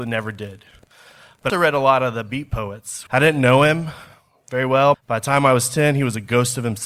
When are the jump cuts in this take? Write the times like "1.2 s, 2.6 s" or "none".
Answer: 1.5 s, 3.1 s, 4.9 s